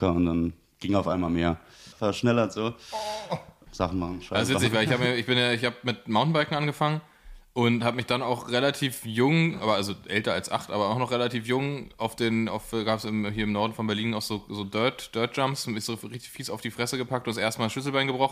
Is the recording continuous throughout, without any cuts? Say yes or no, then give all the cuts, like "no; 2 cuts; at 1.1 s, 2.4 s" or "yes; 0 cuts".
no; 2 cuts; at 1.9 s, 3.7 s